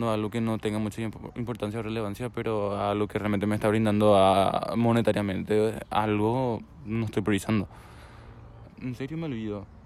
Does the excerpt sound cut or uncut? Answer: cut